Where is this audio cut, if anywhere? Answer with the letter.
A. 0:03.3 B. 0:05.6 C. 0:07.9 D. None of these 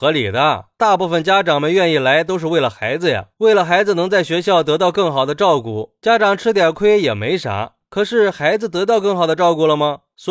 D